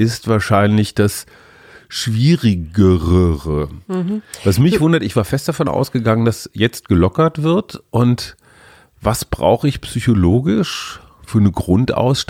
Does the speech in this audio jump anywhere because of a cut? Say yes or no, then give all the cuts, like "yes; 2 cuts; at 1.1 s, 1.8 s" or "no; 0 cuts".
no; 0 cuts